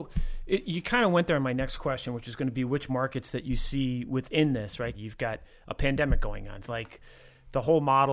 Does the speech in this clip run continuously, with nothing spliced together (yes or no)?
no